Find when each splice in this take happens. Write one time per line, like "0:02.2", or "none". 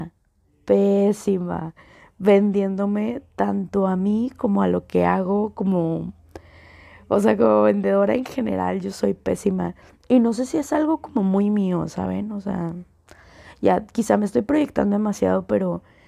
none